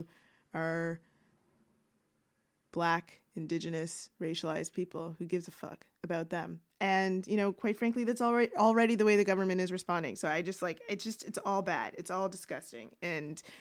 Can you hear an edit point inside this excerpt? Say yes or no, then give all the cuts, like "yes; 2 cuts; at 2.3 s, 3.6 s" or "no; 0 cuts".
no; 0 cuts